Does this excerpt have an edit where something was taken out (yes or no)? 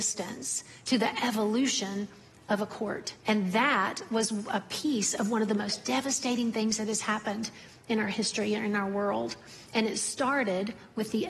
yes